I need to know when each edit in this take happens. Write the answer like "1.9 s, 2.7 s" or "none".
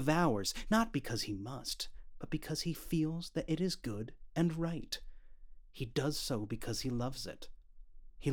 none